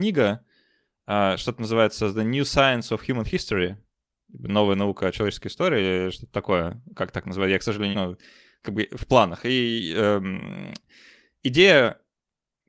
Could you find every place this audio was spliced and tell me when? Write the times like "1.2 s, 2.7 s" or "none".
7.9 s